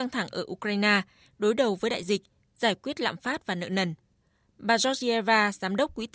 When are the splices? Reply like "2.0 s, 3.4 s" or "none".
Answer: none